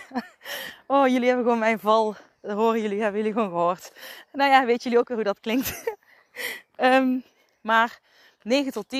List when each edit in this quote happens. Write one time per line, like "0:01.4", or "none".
none